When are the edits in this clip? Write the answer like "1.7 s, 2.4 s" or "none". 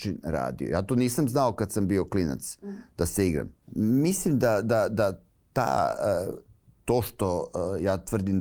3.6 s